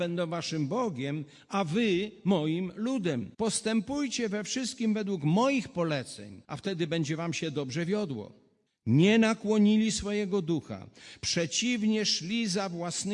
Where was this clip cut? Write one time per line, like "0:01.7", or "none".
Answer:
0:03.3
0:06.4
0:08.7